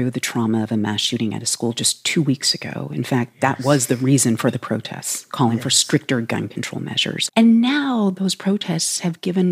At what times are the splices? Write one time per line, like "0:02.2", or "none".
0:07.3

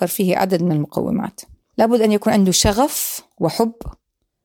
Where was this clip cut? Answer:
0:03.3

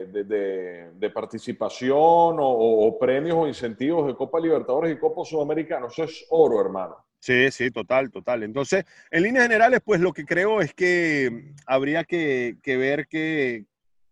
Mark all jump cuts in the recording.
none

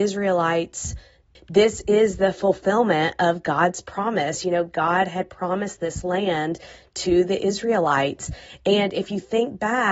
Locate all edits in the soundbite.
0:01.3

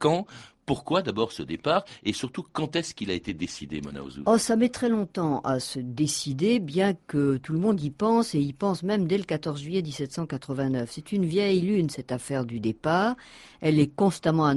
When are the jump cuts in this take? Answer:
none

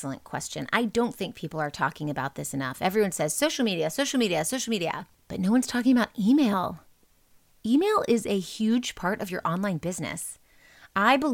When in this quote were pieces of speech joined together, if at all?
none

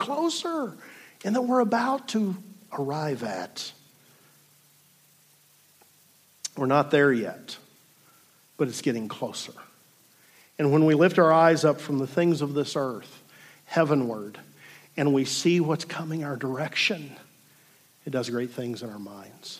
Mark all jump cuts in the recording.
none

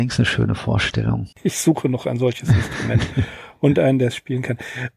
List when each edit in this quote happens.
0:01.3

